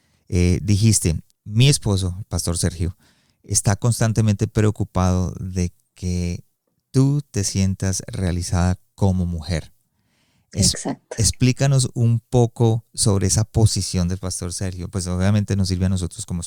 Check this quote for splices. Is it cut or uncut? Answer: cut